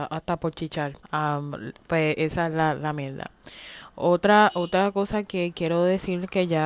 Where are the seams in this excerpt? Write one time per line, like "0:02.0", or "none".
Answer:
0:01.0